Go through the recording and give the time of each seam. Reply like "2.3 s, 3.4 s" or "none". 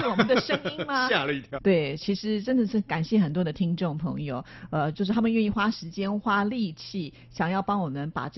1.5 s